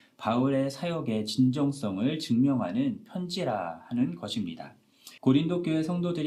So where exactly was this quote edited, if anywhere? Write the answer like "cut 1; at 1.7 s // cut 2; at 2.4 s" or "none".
cut 1; at 5.2 s